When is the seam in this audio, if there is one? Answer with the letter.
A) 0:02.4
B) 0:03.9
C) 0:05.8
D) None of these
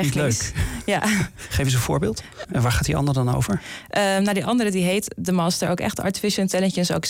A